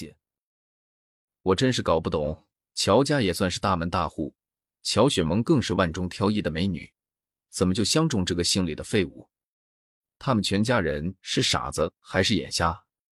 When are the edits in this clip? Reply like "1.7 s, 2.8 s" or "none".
none